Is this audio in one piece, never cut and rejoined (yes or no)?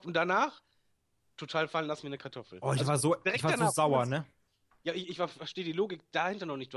yes